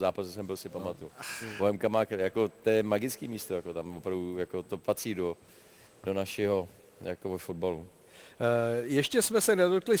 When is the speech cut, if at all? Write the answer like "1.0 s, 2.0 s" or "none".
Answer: none